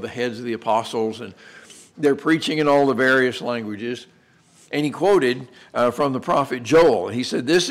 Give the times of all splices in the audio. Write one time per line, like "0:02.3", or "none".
none